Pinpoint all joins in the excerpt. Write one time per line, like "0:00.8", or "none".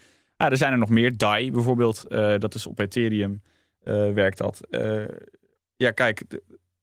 none